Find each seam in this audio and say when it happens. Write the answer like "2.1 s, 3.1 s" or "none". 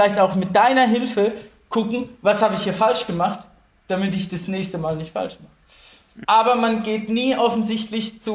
6.2 s